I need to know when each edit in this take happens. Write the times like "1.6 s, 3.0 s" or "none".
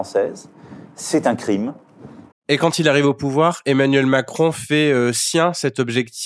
2.3 s

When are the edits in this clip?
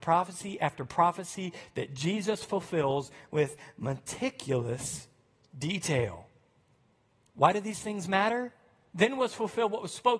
8.9 s

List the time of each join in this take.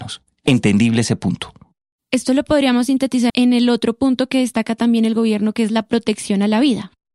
3.3 s

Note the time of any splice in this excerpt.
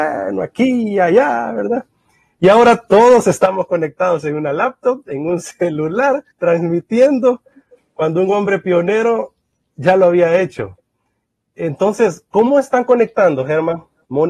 6.3 s

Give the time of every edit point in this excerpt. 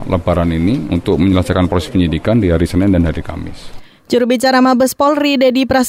none

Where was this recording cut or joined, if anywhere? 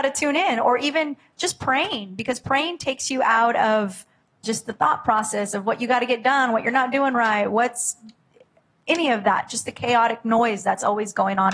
4.4 s

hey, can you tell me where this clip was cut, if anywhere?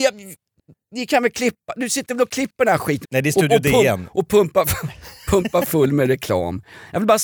3.0 s

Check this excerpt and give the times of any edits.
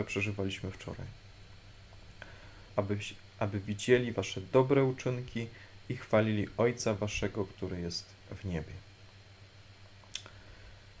2.7 s

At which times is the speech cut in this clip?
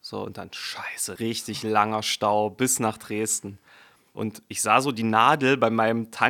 1.2 s, 4.1 s

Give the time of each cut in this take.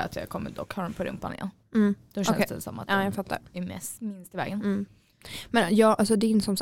none

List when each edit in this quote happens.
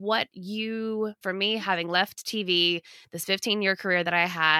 1.2 s

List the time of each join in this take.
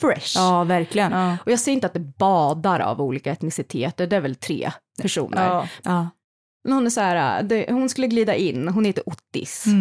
1.1 s, 5.8 s

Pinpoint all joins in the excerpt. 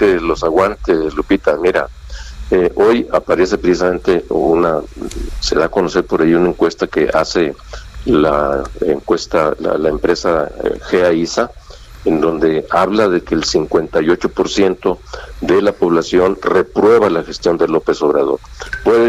none

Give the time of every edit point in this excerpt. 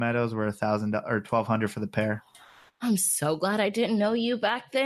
none

